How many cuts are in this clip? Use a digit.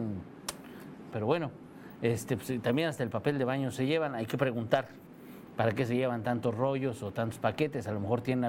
1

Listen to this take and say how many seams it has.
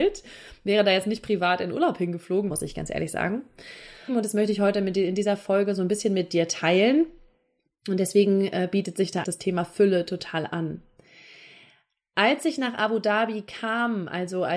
3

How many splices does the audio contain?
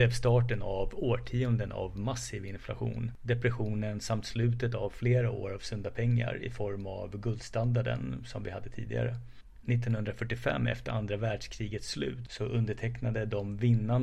1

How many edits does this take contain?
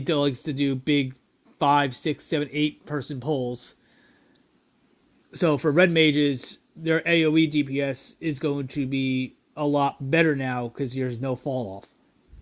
0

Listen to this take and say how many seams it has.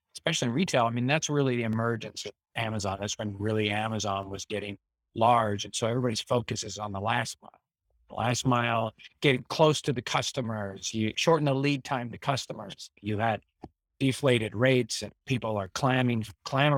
2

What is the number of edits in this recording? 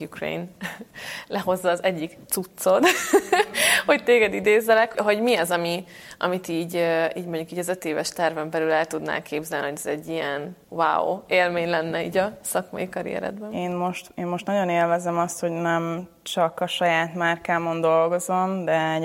2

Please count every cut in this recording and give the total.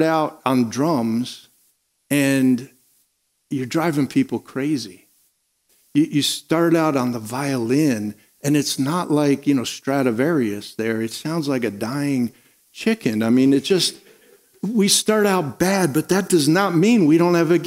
1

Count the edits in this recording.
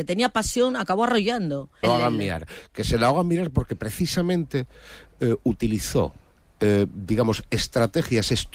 1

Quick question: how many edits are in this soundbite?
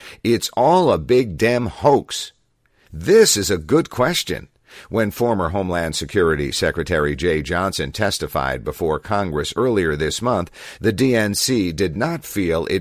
1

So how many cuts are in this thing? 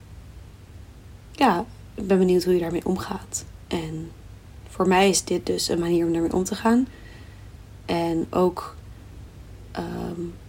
0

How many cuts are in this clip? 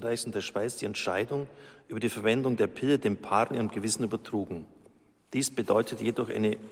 0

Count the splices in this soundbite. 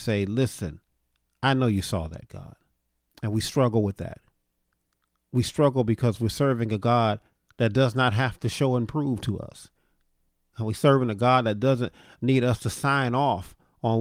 1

